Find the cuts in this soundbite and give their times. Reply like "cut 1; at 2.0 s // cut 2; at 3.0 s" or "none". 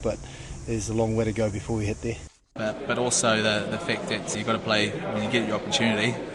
cut 1; at 2.6 s // cut 2; at 4.3 s